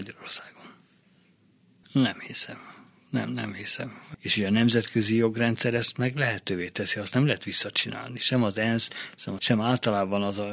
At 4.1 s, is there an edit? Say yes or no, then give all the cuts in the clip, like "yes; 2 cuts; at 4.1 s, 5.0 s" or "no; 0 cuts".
yes; 3 cuts; at 1.8 s, 4.1 s, 9.4 s